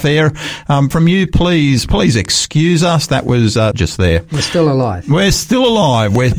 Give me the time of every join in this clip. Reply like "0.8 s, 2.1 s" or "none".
0.9 s, 3.7 s